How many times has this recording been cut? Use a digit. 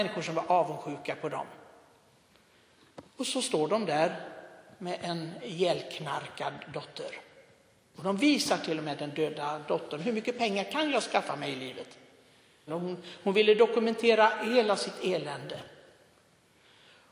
3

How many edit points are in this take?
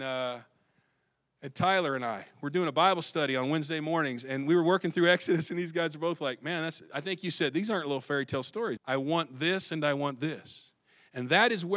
1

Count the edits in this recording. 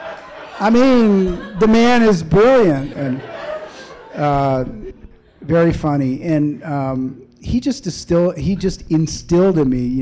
1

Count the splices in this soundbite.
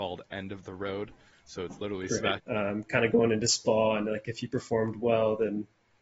1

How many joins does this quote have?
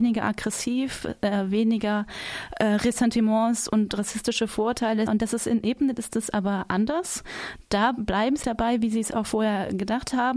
2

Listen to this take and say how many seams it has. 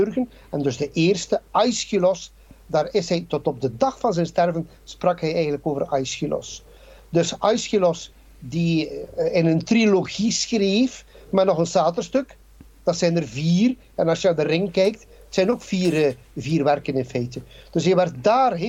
0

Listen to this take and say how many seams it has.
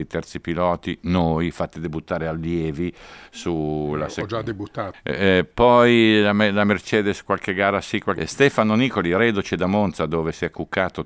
2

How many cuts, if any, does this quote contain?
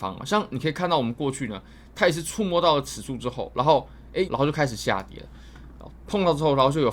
2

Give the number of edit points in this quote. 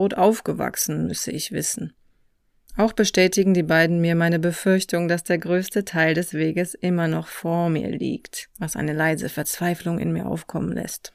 2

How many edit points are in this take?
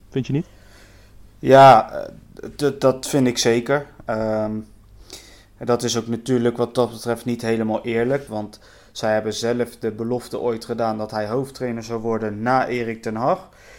1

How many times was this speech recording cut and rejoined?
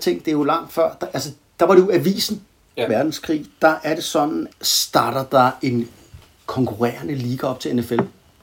2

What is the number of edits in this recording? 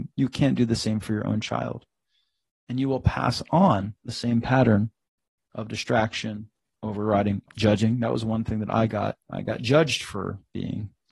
2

